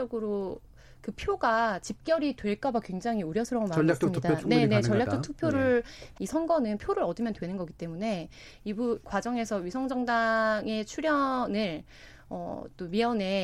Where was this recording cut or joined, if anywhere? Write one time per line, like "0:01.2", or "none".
0:06.2